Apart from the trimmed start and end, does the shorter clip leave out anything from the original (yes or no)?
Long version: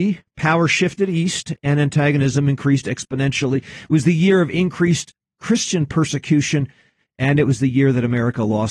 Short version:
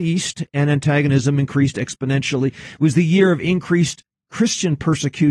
no